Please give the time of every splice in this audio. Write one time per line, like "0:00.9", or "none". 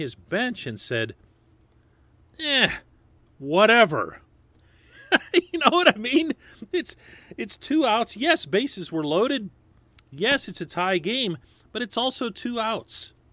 none